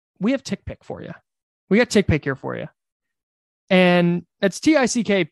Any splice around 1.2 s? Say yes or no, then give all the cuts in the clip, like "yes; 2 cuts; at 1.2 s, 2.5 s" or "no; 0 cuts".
no; 0 cuts